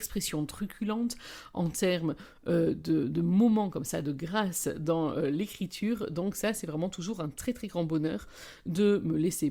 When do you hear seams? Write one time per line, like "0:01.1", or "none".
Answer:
none